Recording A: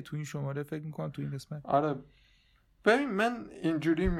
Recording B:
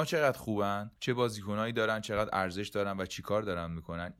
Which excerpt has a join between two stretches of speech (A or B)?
B